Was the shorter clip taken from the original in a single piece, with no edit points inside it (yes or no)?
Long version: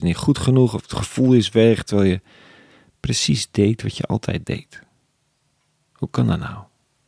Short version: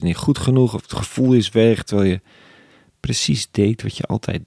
yes